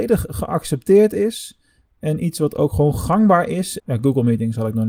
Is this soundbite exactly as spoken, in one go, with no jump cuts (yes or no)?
no